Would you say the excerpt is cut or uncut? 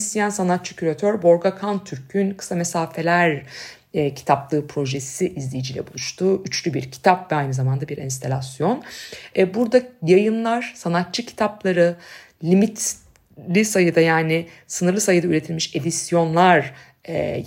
uncut